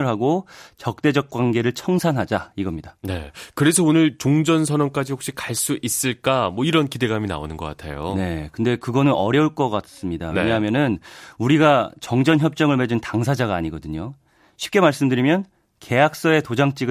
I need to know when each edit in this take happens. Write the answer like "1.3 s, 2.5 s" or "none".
none